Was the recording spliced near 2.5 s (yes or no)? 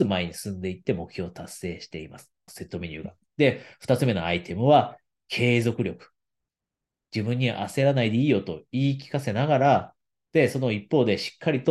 yes